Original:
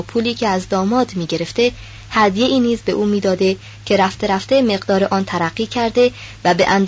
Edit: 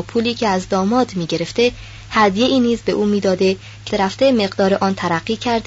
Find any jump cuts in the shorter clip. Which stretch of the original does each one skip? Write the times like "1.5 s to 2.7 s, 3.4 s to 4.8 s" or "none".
3.9 s to 4.2 s